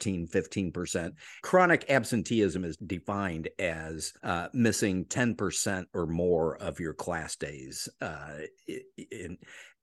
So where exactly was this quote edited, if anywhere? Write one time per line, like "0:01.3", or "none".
0:04.2